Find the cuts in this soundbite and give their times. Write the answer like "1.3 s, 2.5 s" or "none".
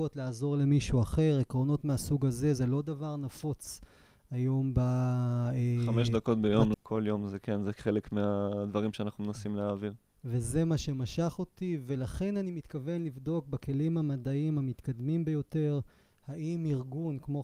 6.7 s